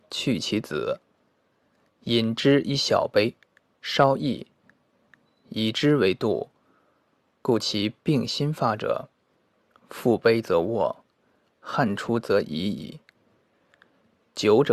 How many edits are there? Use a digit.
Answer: 1